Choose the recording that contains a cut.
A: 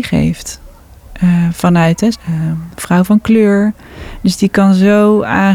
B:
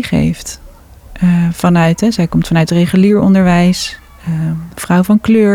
A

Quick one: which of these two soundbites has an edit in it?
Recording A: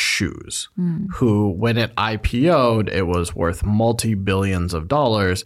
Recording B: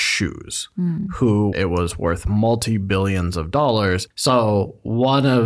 B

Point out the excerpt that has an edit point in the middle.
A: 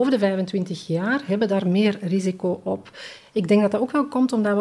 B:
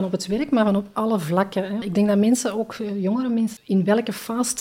B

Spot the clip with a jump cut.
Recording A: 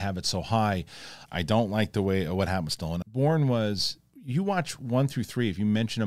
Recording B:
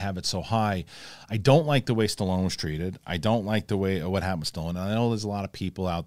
A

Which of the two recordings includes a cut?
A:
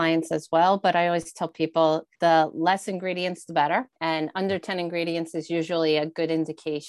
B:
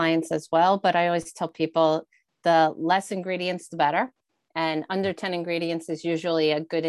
A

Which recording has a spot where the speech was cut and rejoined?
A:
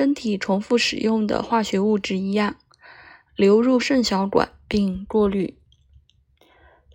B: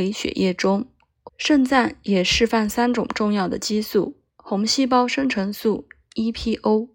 B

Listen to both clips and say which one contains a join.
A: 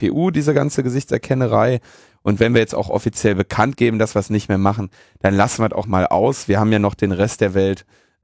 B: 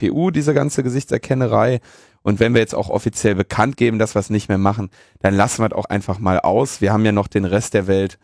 A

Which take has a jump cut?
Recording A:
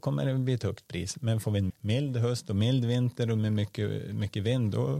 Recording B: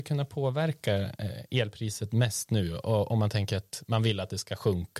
A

